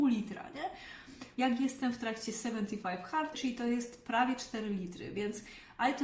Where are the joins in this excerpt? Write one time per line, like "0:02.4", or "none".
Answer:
0:01.3
0:03.3